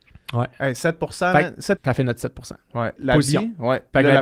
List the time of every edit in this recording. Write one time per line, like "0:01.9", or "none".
0:01.8
0:03.0